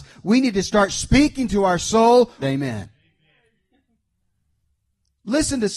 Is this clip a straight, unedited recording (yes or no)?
no